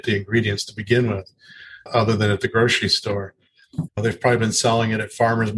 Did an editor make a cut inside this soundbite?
yes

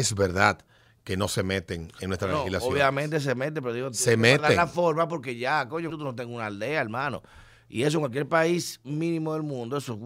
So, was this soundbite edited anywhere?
yes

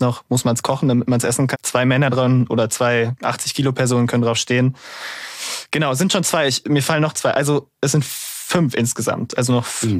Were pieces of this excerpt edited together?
yes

